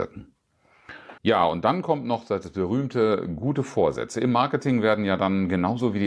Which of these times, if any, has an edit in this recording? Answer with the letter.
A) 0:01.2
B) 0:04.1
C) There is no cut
A